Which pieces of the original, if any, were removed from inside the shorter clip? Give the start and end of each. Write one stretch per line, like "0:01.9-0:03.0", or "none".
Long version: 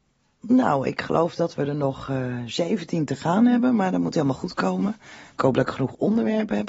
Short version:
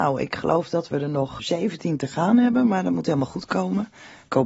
0:02.1-0:02.5